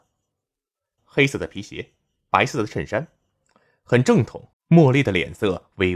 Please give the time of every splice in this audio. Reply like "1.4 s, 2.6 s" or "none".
1.0 s, 4.5 s